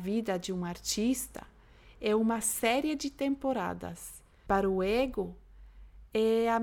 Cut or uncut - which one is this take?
cut